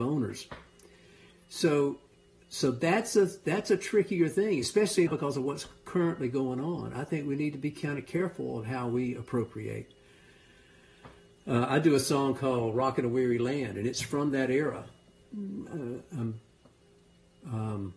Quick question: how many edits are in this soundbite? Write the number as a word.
two